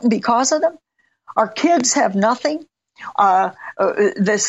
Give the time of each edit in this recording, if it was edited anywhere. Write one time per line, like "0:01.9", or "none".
0:03.1